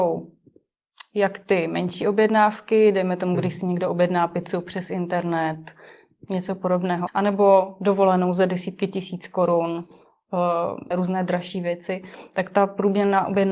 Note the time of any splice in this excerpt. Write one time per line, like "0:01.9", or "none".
0:07.1
0:10.9